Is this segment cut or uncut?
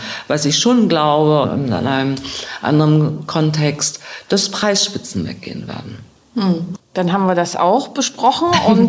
cut